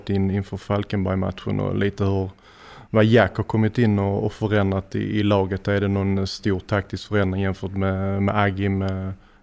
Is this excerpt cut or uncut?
uncut